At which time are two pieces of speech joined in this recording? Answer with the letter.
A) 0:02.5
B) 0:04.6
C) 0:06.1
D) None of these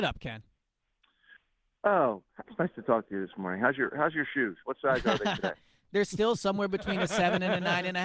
A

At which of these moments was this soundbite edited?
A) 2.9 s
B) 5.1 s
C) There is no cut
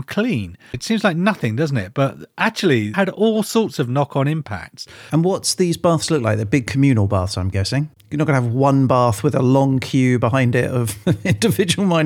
A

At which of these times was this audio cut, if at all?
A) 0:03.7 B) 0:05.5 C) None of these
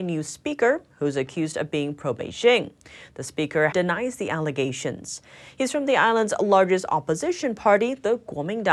A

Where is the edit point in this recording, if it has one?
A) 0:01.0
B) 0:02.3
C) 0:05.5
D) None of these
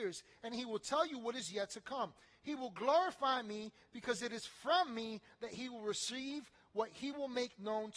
D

